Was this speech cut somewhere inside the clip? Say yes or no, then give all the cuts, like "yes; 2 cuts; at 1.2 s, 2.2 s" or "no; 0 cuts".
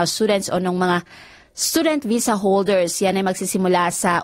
no; 0 cuts